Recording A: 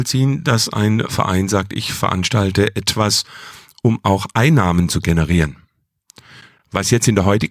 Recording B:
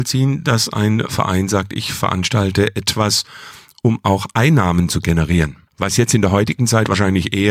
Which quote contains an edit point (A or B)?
B